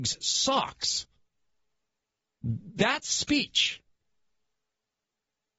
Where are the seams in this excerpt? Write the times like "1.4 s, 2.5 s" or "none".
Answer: 2.4 s